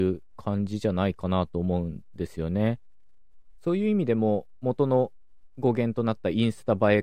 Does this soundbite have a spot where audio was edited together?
no; 0 cuts

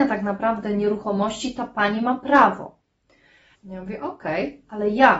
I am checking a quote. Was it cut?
yes; 1 cut; at 3.5 s

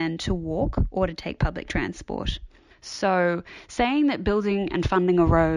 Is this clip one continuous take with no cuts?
no; 1 cut; at 2.7 s

